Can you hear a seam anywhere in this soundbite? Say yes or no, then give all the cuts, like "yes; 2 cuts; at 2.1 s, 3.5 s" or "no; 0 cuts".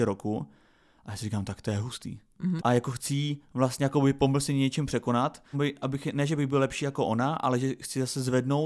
yes; 2 cuts; at 2.6 s, 5.5 s